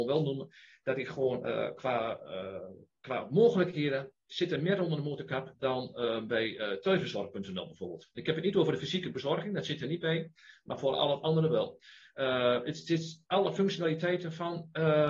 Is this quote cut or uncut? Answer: uncut